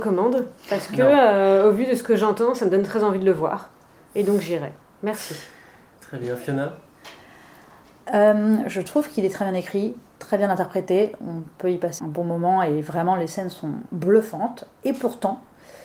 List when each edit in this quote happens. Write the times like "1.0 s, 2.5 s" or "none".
12.0 s, 13.9 s